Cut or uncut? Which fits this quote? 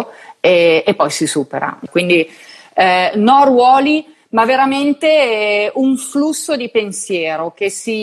cut